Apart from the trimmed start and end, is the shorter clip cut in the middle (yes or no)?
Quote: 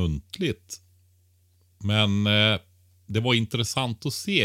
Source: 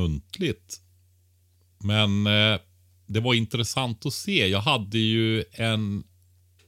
no